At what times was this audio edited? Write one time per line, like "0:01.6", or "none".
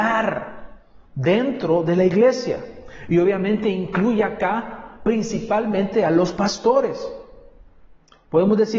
none